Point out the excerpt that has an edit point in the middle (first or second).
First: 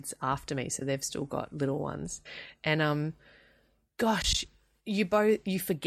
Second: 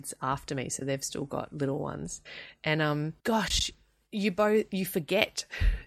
second